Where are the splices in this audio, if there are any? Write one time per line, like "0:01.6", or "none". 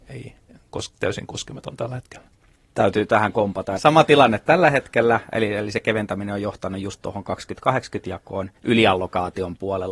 0:03.8
0:08.6

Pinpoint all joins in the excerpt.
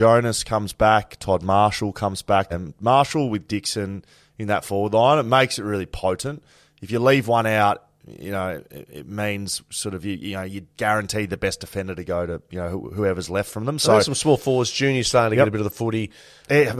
0:02.5

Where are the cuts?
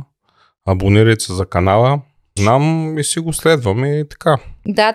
0:02.4

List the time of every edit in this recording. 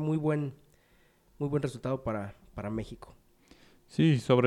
none

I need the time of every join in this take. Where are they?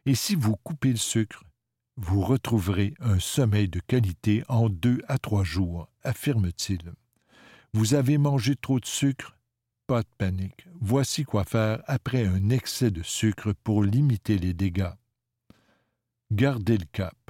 none

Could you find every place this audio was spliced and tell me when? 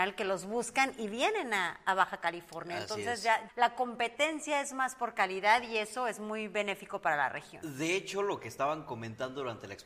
0:03.5

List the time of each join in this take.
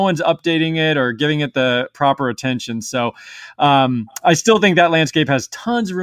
none

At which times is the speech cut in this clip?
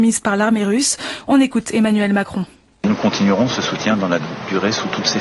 none

